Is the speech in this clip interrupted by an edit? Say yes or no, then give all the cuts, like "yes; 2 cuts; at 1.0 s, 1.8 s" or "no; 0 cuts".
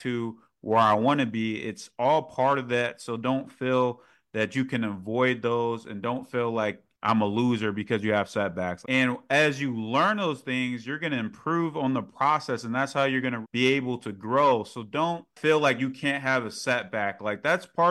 yes; 2 cuts; at 8.8 s, 13.4 s